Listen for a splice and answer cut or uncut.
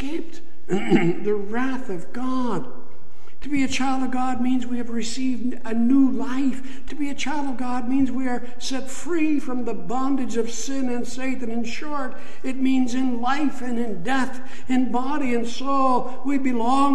cut